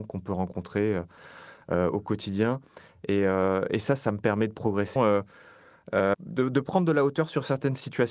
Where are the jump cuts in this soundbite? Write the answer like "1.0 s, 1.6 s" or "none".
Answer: 5.0 s, 6.1 s